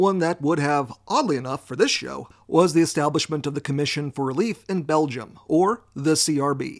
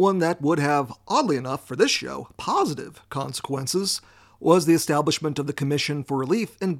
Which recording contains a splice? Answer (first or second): first